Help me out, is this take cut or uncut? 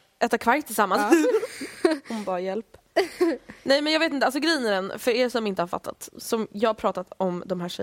uncut